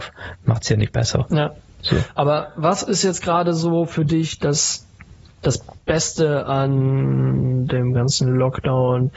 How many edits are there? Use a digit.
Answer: 0